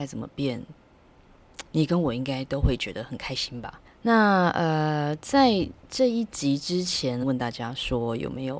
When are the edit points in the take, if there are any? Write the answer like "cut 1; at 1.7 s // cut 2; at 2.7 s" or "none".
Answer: cut 1; at 3.8 s // cut 2; at 7.2 s